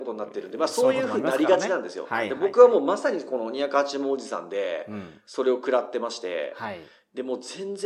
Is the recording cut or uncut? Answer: uncut